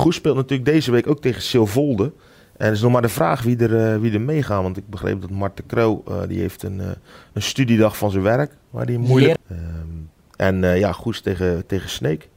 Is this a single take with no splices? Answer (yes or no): no